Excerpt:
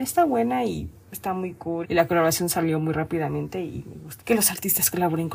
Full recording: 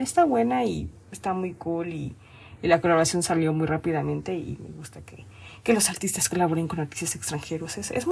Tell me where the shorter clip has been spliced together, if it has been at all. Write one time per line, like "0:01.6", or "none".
0:01.8
0:04.2